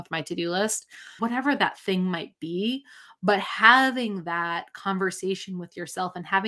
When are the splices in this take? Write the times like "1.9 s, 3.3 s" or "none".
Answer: 1.2 s